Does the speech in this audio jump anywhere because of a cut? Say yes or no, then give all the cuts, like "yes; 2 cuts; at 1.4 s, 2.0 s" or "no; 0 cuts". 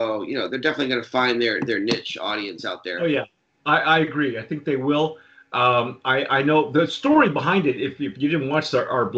no; 0 cuts